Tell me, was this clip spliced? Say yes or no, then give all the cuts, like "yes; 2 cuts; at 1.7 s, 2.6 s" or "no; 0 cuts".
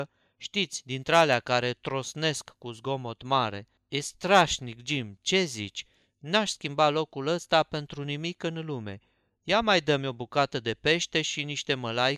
no; 0 cuts